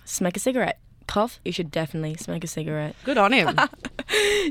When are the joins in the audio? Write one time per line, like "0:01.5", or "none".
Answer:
0:01.4
0:03.0